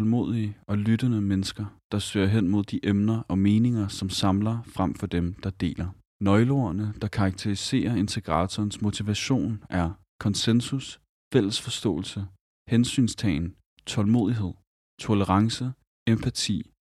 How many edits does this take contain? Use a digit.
2